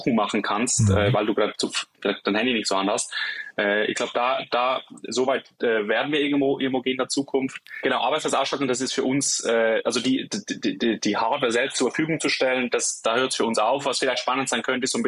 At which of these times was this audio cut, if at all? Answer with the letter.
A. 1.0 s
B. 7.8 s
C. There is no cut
B